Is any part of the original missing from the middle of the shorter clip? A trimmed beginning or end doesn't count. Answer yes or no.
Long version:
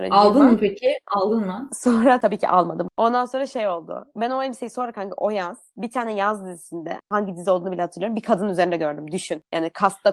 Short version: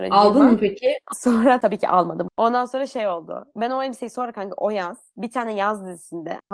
yes